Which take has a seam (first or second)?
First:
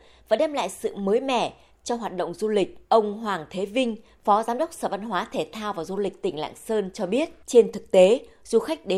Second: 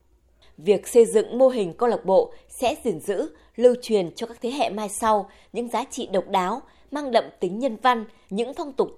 first